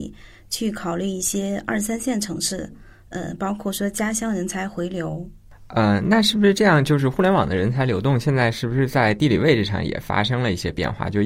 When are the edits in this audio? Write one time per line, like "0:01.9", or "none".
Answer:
none